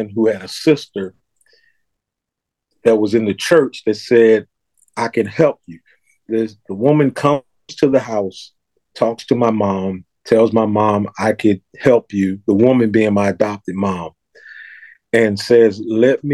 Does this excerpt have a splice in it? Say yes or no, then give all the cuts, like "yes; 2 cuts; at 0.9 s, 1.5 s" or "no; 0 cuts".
yes; 1 cut; at 11.7 s